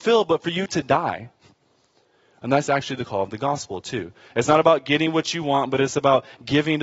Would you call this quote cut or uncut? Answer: uncut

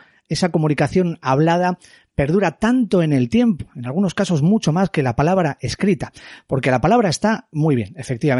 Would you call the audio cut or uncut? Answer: uncut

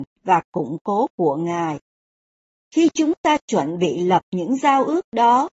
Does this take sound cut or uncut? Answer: cut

